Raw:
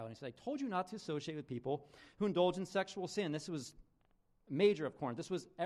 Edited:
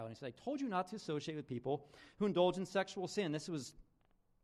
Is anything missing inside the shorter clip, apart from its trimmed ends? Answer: no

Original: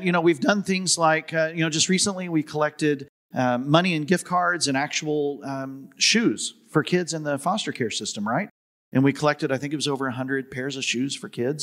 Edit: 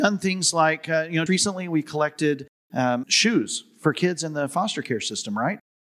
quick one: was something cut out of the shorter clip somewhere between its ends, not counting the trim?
yes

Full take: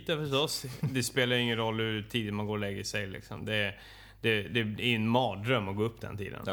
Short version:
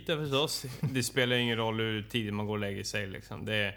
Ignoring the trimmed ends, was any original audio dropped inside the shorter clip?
no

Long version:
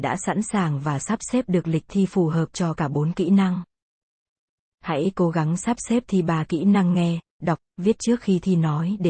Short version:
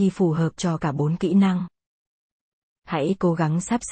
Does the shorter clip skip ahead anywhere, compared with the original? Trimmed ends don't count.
no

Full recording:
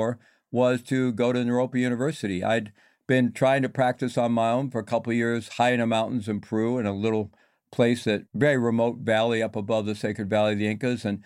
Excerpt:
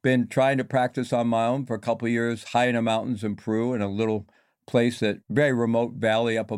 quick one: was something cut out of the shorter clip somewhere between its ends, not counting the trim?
no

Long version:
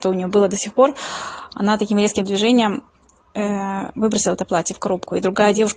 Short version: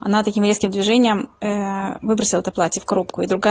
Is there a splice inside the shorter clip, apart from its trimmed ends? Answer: yes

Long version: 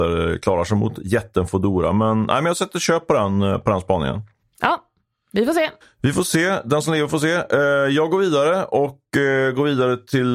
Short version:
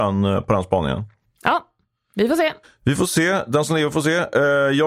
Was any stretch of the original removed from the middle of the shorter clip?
no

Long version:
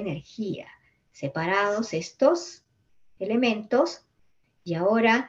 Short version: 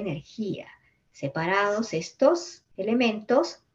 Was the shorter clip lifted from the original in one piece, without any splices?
no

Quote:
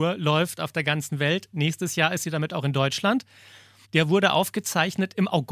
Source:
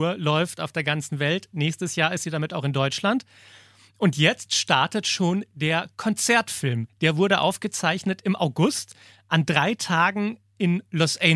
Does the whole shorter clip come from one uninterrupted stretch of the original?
no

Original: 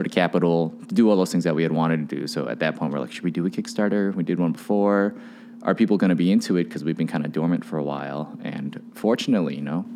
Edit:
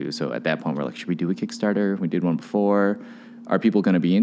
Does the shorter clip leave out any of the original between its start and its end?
no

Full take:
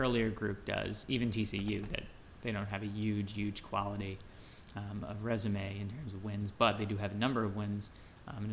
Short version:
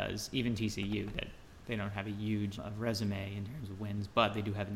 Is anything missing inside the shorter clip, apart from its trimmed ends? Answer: yes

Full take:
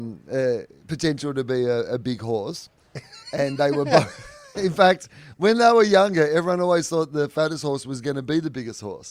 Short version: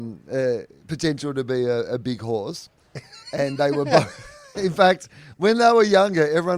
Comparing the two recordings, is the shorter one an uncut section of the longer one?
yes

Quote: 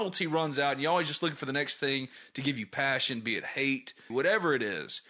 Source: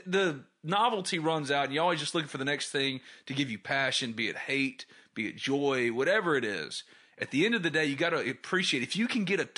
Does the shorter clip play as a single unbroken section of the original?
no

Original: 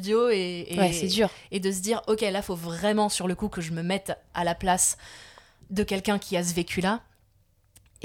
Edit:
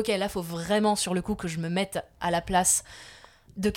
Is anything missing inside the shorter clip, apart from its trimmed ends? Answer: no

